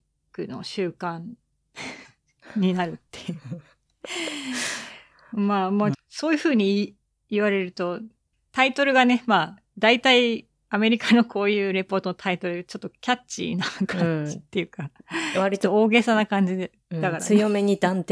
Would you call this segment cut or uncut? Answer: cut